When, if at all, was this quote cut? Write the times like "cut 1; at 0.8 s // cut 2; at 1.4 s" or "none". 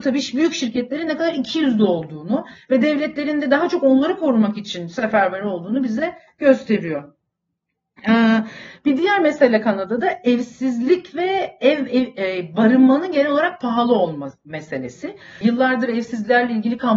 cut 1; at 15.4 s